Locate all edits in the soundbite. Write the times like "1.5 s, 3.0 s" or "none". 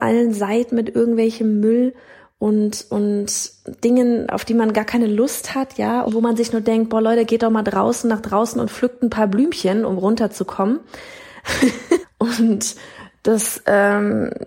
6.1 s, 12.0 s